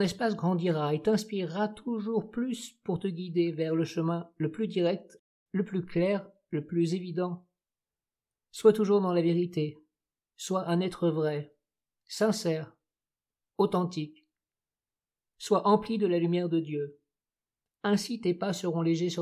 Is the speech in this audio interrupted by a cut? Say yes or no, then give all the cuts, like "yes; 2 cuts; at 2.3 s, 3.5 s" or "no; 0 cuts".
no; 0 cuts